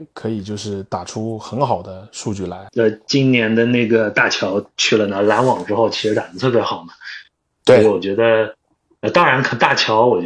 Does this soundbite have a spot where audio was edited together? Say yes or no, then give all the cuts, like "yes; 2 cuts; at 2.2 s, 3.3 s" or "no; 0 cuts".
yes; 1 cut; at 2.7 s